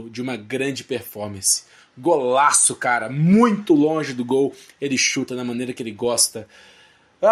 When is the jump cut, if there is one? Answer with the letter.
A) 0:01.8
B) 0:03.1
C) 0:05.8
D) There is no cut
D